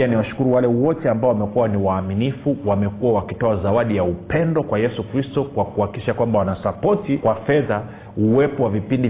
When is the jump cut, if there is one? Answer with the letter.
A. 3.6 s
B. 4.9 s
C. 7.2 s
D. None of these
C